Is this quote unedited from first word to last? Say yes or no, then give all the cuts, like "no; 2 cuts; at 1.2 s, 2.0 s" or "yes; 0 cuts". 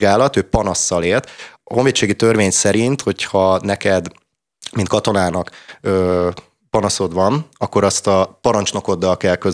no; 1 cut; at 1.5 s